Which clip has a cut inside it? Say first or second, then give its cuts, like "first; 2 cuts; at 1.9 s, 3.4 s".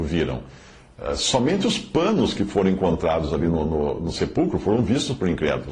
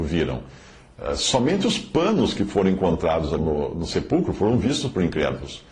second; 1 cut; at 3.4 s